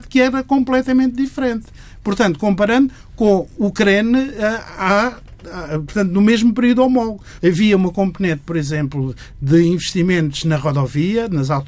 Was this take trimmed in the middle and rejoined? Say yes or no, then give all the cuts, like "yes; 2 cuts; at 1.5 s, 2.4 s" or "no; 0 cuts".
yes; 1 cut; at 7.4 s